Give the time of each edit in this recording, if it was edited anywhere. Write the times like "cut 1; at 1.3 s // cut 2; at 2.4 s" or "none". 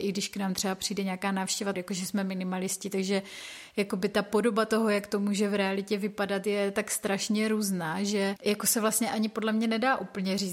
cut 1; at 1.7 s // cut 2; at 8.4 s